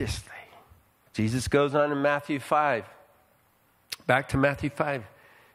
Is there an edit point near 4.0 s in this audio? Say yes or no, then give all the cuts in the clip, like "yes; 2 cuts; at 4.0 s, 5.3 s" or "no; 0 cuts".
no; 1 cut; at 1.1 s